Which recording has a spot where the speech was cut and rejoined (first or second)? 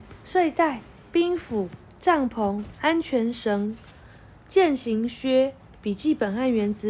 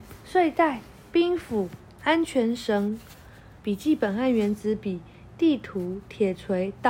second